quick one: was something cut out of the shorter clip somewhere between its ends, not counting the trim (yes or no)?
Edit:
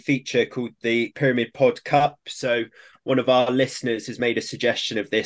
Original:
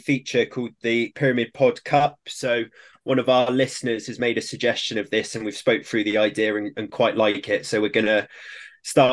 no